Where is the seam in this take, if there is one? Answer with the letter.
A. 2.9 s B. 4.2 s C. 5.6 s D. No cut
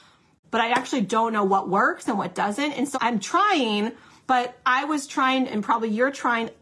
A